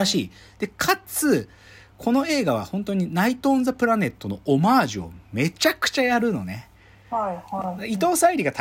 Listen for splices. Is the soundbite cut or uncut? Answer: uncut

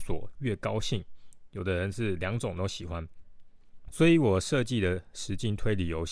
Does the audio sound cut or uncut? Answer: cut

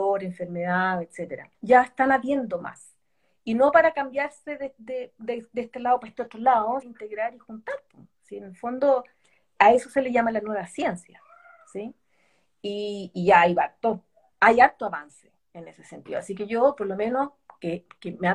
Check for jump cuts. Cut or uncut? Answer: cut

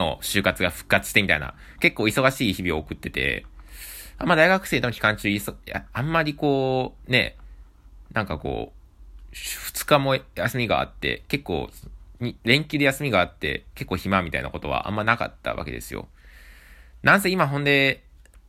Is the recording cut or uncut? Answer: uncut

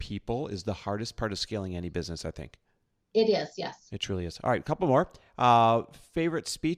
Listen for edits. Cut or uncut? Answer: uncut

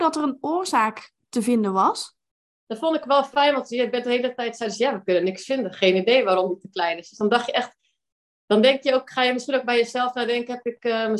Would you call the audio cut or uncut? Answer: uncut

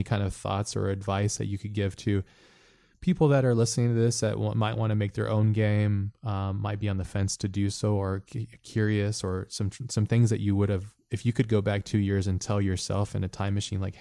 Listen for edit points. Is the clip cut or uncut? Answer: uncut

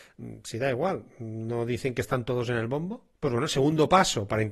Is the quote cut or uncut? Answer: cut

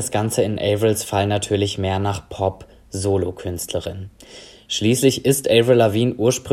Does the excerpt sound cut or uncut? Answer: uncut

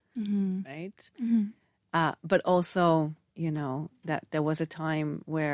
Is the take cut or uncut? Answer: cut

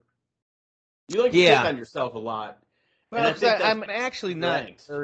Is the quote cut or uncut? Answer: cut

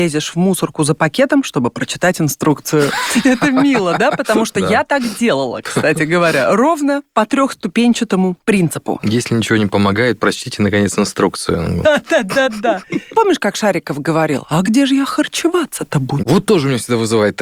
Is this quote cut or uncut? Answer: cut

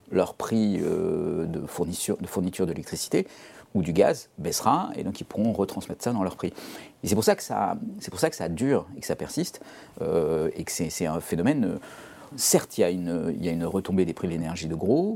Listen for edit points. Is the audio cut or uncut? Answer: cut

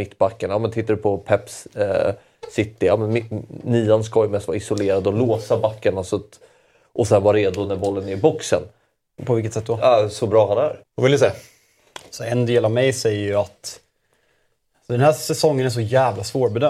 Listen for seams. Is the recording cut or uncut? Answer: cut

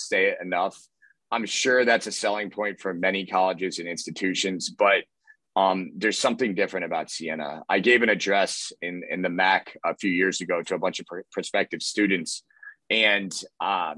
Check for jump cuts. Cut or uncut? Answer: uncut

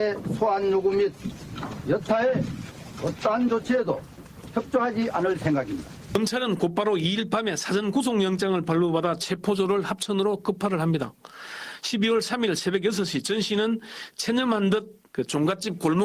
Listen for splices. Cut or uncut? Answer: cut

